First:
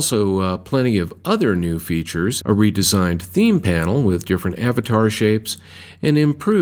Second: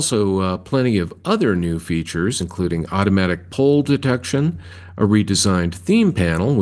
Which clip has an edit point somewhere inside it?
first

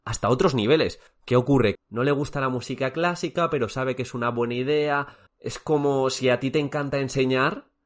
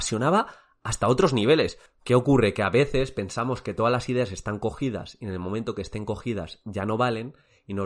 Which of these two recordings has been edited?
first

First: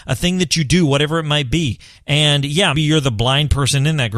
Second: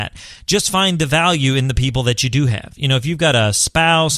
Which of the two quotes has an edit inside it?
first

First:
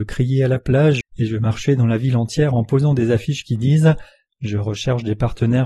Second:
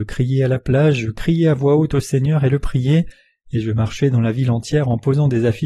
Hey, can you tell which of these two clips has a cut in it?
first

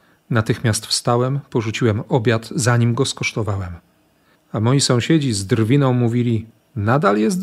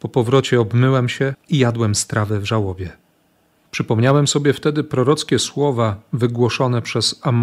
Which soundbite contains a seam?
first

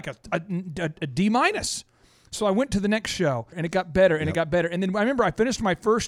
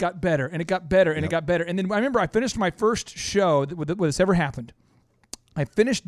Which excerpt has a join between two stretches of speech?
first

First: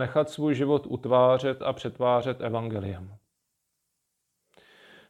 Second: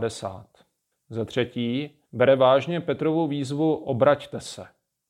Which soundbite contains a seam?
second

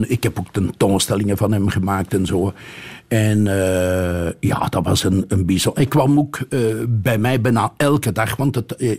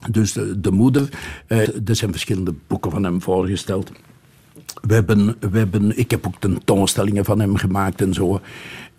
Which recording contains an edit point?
second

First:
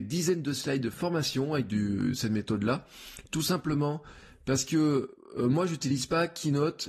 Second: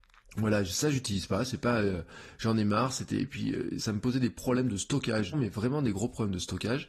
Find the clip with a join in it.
second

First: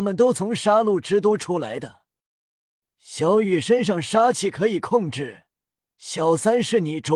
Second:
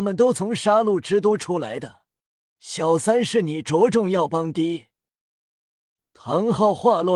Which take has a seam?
second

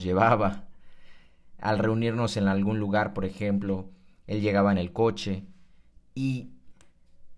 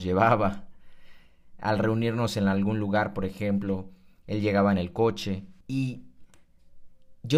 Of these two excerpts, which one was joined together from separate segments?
second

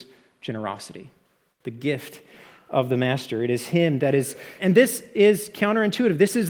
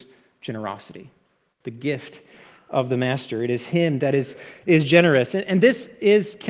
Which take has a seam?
first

